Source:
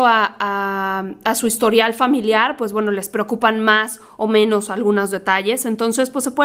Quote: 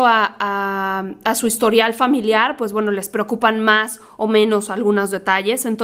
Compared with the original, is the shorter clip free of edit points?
yes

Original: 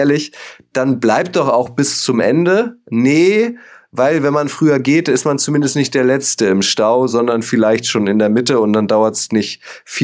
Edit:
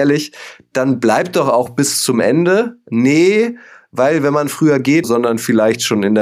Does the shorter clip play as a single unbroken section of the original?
no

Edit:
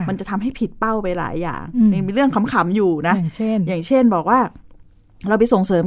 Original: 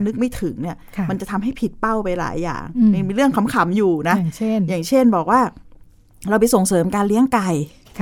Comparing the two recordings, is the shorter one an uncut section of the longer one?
yes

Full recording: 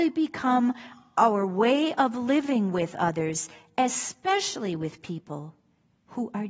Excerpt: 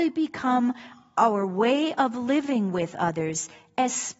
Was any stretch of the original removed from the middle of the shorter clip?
no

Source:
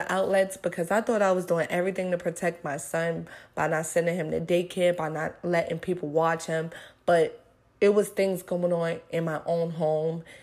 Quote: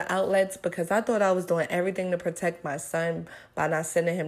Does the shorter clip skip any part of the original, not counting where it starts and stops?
no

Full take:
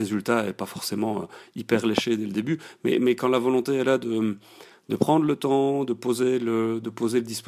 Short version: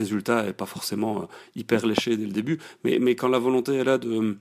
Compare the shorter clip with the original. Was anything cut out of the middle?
no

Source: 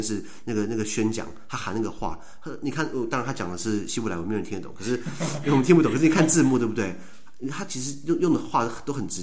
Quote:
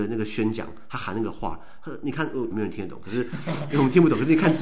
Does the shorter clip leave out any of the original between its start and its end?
yes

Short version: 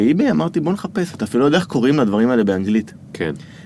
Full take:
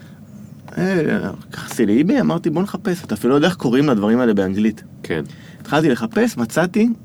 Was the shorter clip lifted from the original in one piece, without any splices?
yes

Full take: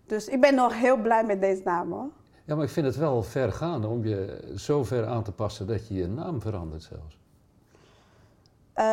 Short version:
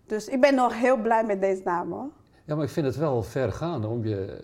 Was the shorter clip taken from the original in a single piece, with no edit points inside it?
yes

